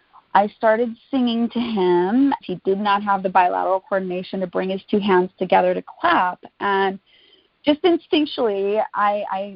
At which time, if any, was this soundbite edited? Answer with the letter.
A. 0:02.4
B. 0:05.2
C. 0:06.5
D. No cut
A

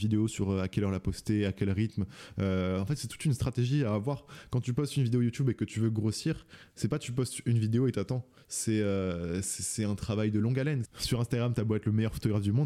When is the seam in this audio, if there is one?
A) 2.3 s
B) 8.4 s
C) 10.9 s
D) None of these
C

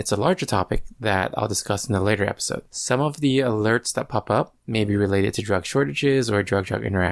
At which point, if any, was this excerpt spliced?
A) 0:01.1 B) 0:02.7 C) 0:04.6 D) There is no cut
B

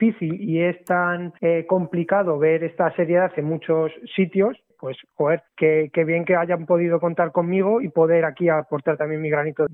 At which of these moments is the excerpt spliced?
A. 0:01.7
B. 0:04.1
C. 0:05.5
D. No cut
C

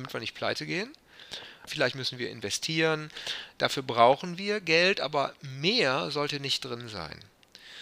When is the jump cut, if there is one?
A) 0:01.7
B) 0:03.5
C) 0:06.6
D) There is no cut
A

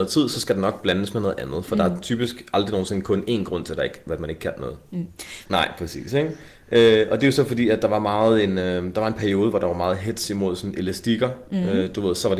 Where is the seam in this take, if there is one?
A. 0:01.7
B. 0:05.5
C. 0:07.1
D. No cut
B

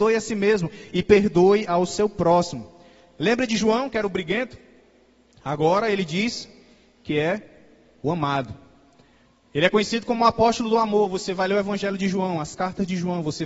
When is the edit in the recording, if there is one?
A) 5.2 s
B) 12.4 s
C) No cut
C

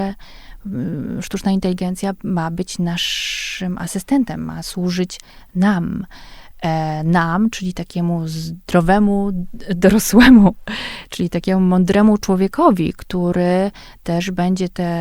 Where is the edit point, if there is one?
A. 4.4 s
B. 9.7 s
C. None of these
C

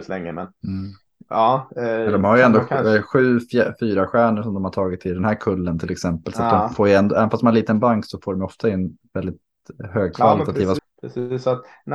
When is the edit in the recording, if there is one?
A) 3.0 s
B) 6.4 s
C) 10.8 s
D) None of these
C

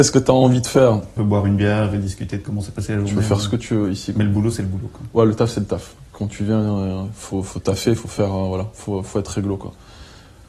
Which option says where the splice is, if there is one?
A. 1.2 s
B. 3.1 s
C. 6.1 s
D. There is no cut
A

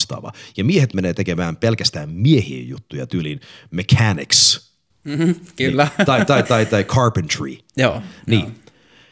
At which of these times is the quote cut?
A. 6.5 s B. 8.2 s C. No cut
A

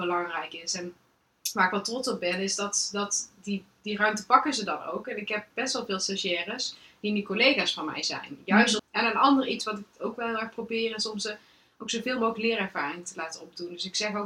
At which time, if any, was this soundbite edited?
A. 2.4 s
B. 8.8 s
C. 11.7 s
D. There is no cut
B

